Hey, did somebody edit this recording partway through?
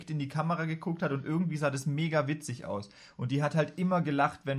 no; 0 cuts

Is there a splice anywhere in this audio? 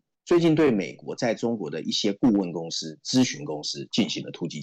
no; 0 cuts

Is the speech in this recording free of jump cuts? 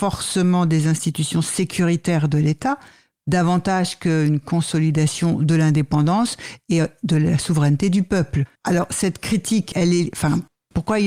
no; 1 cut; at 8.6 s

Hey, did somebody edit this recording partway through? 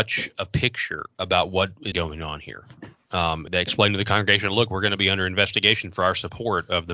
yes; 2 cuts; at 1.9 s, 3.5 s

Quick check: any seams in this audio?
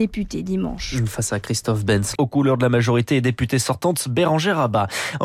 yes; 1 cut; at 2.2 s

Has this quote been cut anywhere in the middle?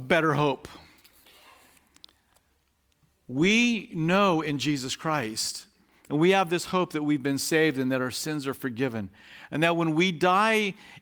no; 0 cuts

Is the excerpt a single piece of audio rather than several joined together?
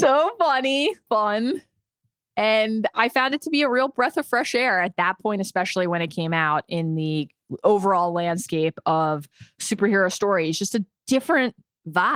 no; 1 cut; at 1.1 s

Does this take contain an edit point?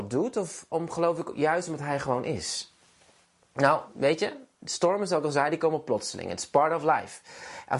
no; 0 cuts

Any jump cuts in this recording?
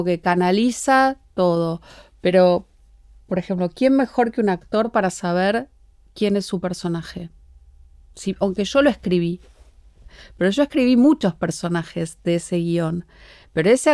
no; 0 cuts

